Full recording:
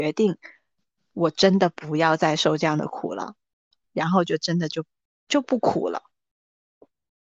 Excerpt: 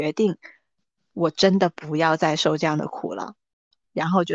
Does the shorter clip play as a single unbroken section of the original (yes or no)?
yes